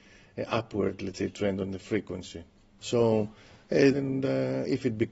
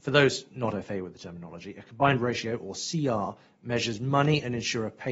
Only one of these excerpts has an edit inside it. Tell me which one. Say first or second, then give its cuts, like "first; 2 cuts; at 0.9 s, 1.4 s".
first; 2 cuts; at 2.8 s, 3.9 s